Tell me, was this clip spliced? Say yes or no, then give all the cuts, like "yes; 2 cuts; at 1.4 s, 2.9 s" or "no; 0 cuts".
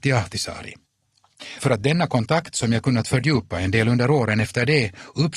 no; 0 cuts